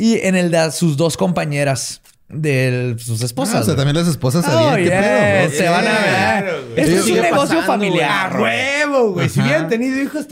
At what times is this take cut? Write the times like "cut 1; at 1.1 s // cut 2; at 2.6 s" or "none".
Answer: none